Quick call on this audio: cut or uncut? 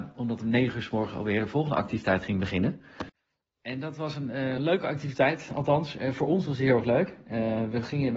uncut